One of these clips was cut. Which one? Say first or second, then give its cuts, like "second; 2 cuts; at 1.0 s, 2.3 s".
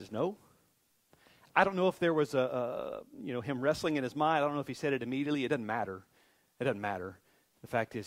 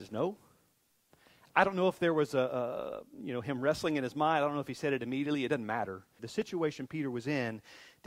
second; 1 cut; at 6.2 s